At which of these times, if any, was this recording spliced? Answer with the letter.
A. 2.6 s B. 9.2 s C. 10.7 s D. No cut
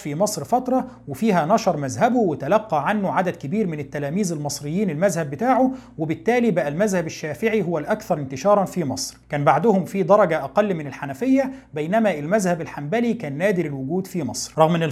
B